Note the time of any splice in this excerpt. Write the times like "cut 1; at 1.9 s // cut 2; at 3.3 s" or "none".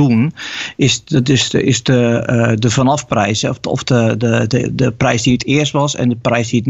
none